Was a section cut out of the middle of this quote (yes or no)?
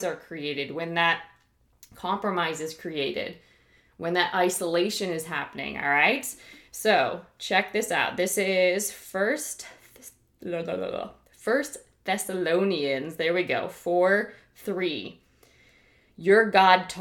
no